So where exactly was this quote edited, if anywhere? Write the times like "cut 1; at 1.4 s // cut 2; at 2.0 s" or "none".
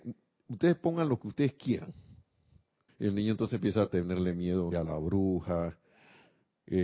cut 1; at 2.9 s // cut 2; at 4.7 s